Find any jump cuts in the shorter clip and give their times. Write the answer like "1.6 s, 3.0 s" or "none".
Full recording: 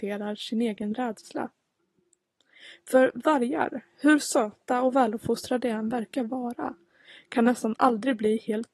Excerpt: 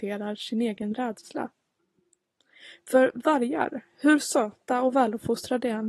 none